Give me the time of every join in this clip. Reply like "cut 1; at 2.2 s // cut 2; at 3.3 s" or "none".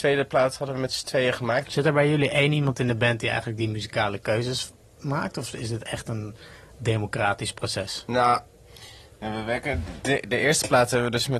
cut 1; at 1.6 s